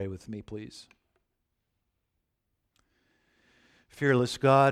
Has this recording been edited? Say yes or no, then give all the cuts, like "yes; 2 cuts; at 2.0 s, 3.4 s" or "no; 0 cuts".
no; 0 cuts